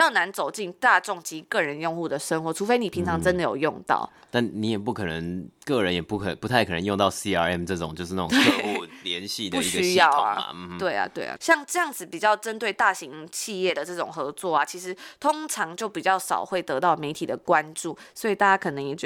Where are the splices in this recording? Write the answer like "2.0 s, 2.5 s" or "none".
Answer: 11.4 s